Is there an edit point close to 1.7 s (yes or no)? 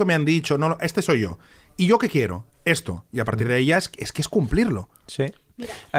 no